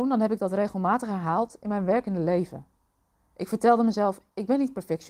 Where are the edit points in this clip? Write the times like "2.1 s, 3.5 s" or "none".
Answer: none